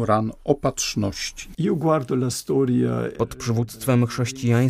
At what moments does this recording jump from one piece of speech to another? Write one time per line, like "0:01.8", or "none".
0:03.2